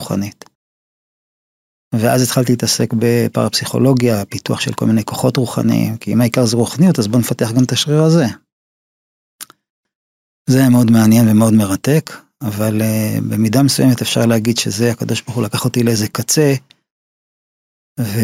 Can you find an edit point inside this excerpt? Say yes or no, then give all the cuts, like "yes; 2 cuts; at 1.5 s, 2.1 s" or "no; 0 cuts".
no; 0 cuts